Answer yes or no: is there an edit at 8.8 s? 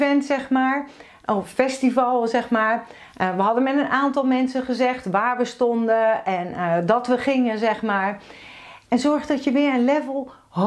yes